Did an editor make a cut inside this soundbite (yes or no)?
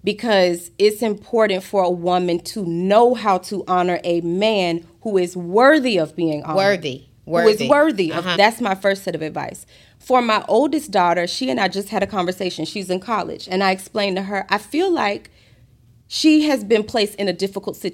yes